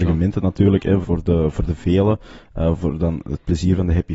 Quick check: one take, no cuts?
no; 1 cut; at 1.0 s

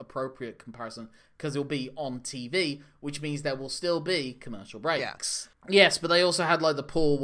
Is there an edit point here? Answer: yes; 1 cut; at 5.5 s

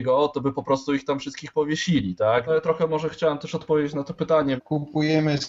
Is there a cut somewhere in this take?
yes; 2 cuts; at 2.5 s, 4.6 s

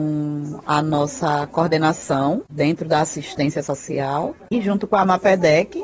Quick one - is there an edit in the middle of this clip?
yes; 1 cut; at 4.4 s

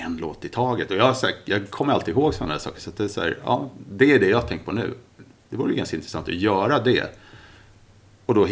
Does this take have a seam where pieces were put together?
no; 0 cuts

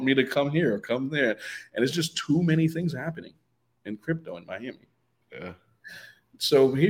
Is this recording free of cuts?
no; 1 cut; at 5.2 s

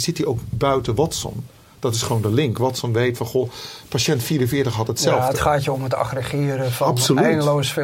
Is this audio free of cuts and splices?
yes; 0 cuts

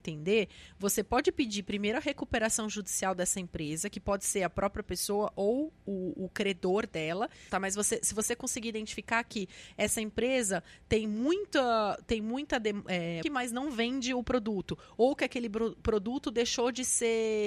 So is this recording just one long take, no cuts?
no; 2 cuts; at 7.5 s, 13.2 s

